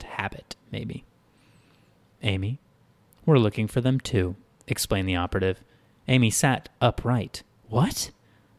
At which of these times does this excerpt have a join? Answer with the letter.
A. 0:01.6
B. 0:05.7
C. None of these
C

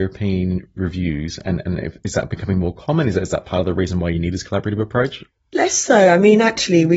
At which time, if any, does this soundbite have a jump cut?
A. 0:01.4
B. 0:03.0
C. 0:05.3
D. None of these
D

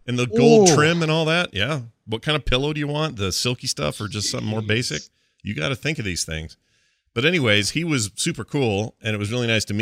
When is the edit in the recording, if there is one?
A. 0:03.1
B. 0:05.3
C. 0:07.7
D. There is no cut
D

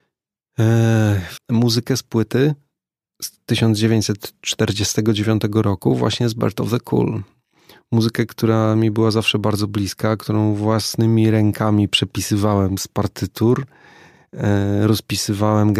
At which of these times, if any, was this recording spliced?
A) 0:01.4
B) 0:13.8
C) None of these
A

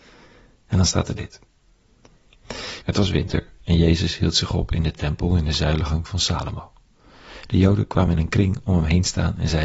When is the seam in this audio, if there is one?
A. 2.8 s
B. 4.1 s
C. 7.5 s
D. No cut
A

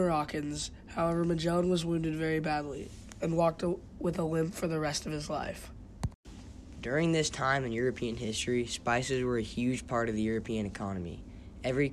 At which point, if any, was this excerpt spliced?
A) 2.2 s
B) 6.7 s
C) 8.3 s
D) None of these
D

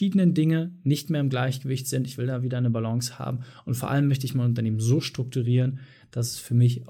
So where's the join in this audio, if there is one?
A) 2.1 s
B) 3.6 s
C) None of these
C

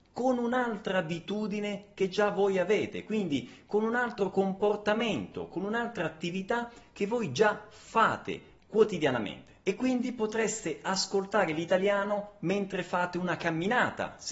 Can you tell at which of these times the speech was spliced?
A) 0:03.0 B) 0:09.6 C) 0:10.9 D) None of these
D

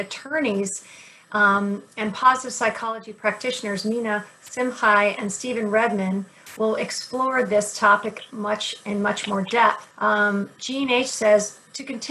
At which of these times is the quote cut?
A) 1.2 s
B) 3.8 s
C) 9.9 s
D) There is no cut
C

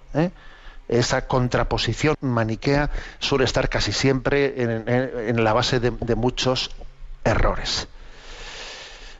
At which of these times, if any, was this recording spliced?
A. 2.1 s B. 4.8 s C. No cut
A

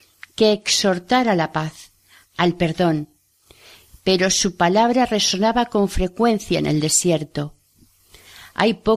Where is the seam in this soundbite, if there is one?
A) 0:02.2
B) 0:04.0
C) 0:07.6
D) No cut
A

